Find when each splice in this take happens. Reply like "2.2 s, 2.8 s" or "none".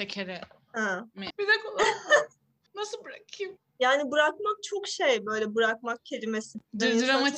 1.3 s